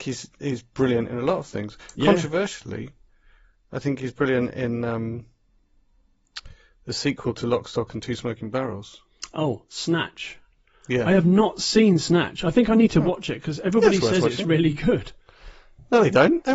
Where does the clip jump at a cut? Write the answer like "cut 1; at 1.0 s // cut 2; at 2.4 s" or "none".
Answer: none